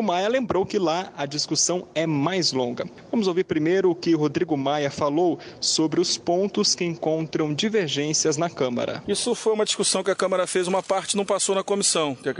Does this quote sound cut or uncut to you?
uncut